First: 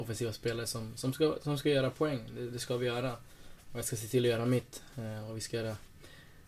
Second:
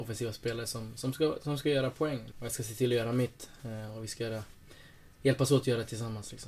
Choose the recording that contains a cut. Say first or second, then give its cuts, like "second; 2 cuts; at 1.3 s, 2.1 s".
second; 1 cut; at 2.3 s